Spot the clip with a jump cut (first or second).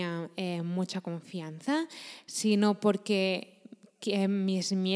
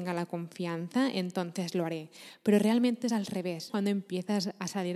second